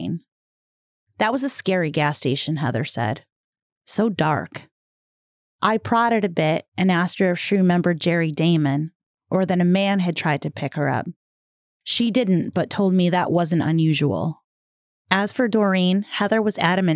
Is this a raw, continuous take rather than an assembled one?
no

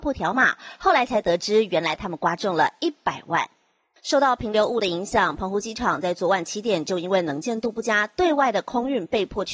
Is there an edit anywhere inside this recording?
yes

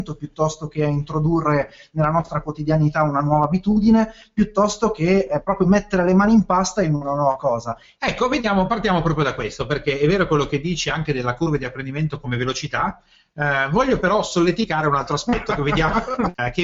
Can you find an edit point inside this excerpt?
yes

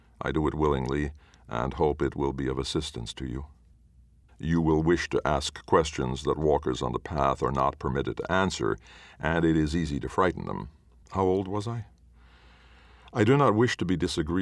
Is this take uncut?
no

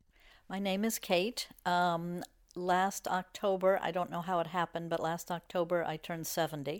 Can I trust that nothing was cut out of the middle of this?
yes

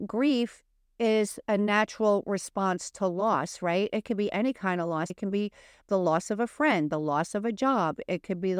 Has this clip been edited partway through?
yes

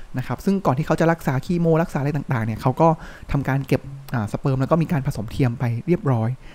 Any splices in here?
no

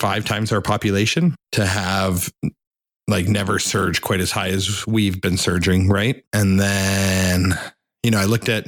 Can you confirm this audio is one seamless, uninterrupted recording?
yes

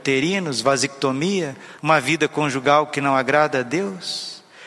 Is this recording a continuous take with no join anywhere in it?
no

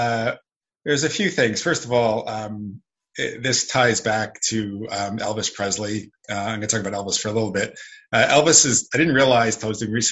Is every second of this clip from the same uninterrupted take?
yes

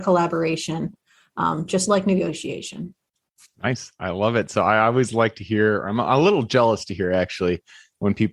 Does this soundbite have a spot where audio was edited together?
no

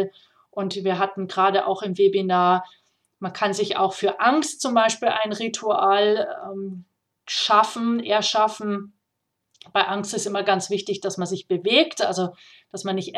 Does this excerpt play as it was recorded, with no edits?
yes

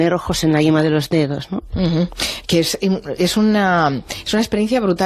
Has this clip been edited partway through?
no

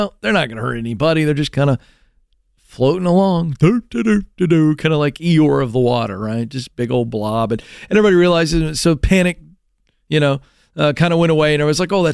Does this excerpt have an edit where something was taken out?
no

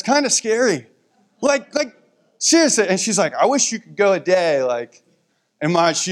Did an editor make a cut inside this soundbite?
no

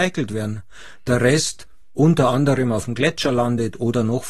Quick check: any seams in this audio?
no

